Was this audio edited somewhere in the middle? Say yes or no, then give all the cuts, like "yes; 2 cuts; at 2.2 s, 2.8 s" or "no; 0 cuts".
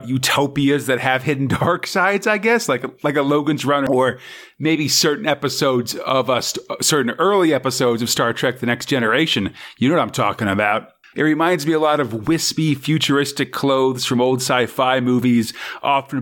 yes; 1 cut; at 11.1 s